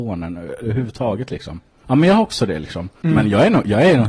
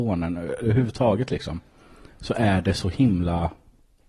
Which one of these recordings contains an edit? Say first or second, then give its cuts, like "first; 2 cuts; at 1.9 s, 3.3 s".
first; 2 cuts; at 1.8 s, 3.0 s